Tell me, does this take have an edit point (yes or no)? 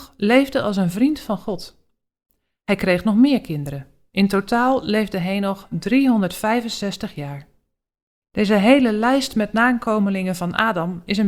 yes